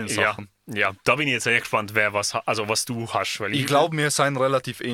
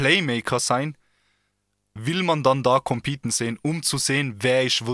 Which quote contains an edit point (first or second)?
second